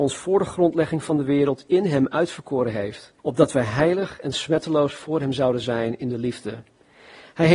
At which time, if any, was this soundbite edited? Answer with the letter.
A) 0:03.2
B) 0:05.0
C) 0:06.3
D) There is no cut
A